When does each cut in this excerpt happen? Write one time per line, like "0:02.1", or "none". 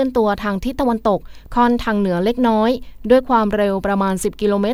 none